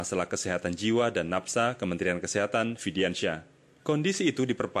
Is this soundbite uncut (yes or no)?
no